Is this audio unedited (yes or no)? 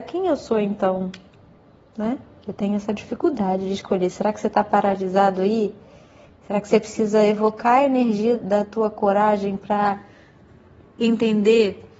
no